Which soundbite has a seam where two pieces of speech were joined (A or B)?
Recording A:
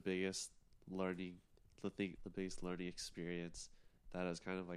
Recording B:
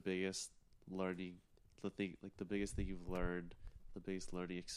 A